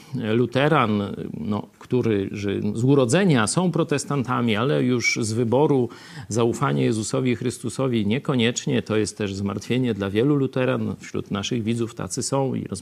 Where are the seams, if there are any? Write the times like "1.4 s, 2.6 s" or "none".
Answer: none